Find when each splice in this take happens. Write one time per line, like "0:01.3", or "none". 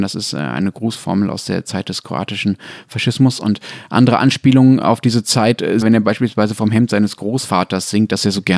0:05.8